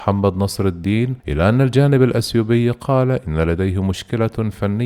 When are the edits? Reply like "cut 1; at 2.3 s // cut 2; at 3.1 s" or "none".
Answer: cut 1; at 1.2 s